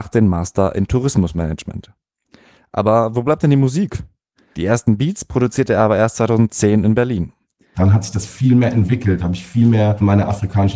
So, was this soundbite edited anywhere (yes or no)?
yes